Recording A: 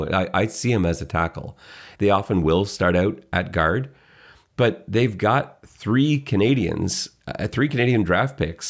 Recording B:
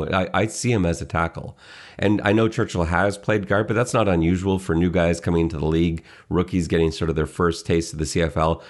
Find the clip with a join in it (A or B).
A